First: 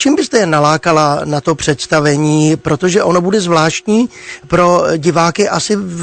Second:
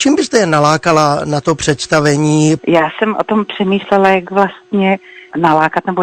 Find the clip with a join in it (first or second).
second